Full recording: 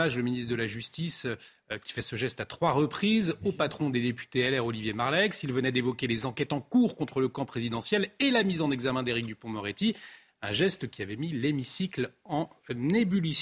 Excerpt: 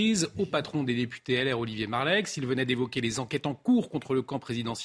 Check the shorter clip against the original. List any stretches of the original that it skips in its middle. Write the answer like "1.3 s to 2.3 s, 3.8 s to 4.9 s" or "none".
none